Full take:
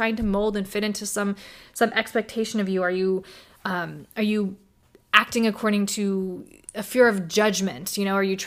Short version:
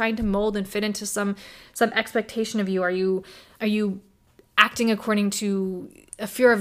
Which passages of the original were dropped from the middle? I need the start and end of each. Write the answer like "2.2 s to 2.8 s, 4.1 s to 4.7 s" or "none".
3.6 s to 4.1 s